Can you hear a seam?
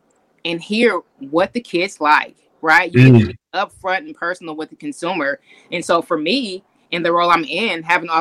no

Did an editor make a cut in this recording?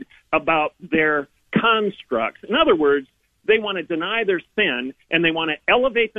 no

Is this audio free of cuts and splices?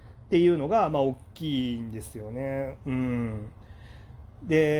yes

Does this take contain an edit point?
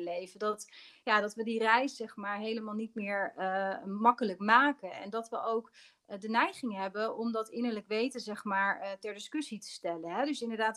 no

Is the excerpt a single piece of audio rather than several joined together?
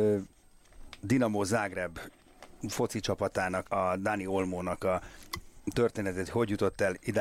no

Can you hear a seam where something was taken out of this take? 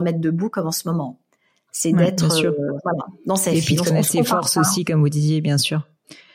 no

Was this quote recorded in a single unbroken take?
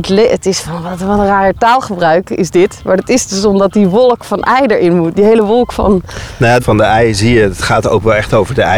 no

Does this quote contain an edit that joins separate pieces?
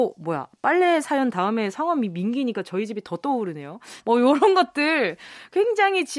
yes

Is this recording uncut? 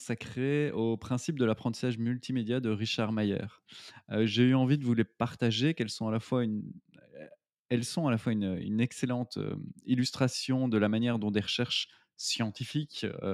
yes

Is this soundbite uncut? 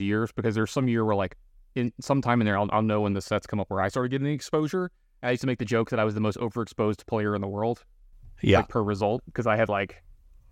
yes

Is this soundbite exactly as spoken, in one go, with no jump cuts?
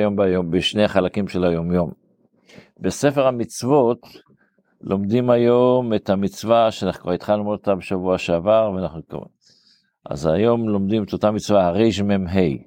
yes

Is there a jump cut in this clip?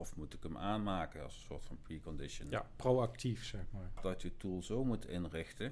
yes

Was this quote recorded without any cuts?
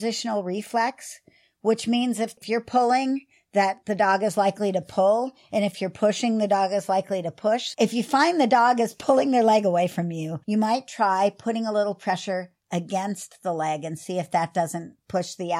no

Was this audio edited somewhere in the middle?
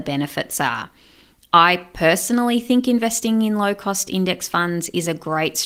no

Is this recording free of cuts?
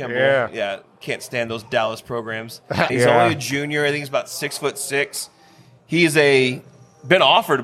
no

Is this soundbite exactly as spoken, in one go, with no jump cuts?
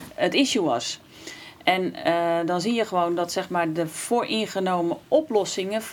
yes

